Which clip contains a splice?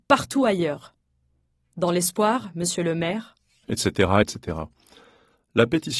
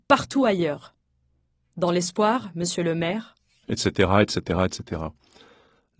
first; 1 cut; at 4.2 s

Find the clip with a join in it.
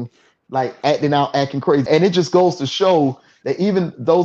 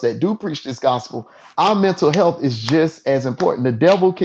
first; 1 cut; at 1.9 s

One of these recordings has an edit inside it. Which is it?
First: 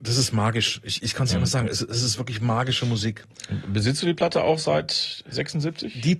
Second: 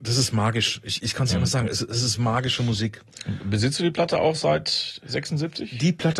second; 1 cut; at 2.2 s

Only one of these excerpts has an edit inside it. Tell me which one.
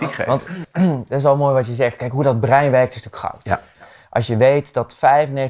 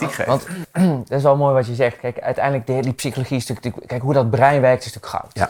first; 1 cut; at 2.0 s

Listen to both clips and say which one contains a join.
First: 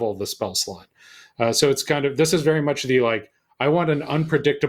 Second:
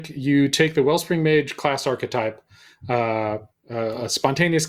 second; 1 cut; at 3.5 s

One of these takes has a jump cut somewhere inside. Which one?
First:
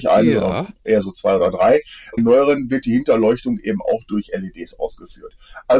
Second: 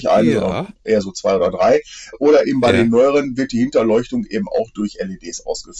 first; 1 cut; at 2.2 s

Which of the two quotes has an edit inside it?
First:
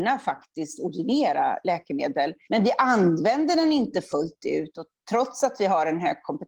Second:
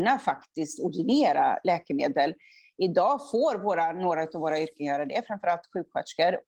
first; 1 cut; at 2.5 s

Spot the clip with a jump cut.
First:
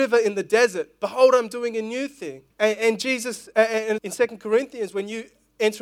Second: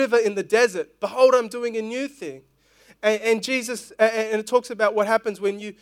first; 2 cuts; at 2.5 s, 4.0 s

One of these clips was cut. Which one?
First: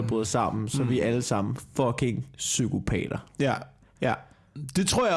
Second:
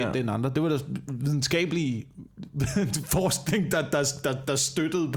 first; 1 cut; at 4.0 s

